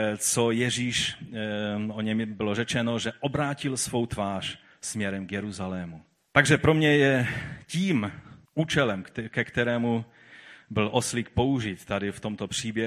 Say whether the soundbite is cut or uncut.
cut